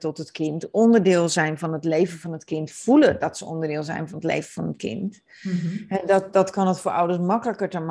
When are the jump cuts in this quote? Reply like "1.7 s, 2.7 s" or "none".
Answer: none